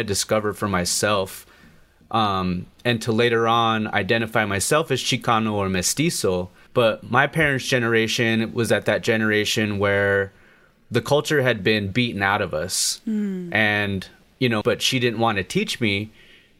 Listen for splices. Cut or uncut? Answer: cut